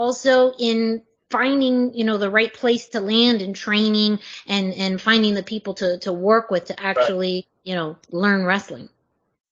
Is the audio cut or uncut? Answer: uncut